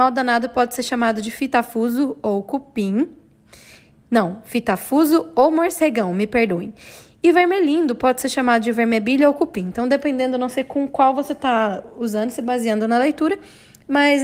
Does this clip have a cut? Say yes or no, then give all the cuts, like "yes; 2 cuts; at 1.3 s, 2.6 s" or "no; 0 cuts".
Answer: no; 0 cuts